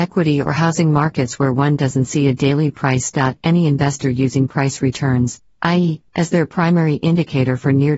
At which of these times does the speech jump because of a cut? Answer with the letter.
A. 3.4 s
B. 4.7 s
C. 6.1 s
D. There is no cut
C